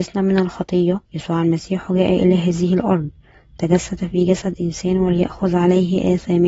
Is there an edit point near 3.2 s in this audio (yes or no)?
no